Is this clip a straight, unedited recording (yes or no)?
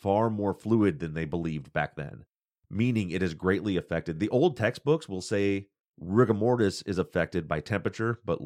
yes